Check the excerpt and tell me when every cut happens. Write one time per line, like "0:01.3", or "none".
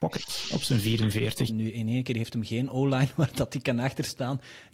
0:01.5